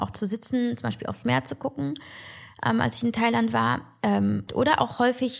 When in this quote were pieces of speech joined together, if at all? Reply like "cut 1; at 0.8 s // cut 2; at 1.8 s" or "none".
cut 1; at 4.5 s